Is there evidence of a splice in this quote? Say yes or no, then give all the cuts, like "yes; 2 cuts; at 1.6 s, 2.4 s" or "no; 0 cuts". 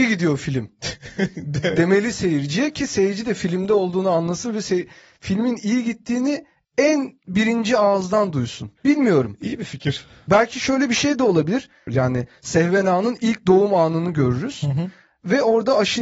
yes; 2 cuts; at 8.8 s, 11.9 s